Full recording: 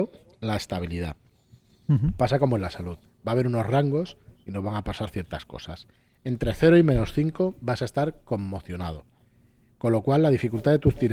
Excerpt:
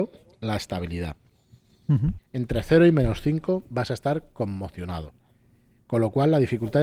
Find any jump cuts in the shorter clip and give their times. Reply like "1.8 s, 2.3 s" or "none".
2.2 s